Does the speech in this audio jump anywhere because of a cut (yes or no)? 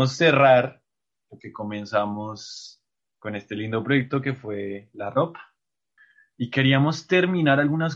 no